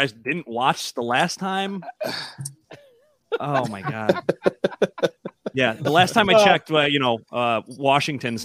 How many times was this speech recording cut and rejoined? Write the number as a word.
zero